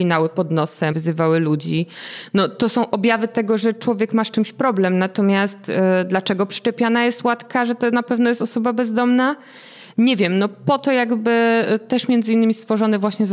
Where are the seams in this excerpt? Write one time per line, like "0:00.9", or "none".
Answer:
0:00.9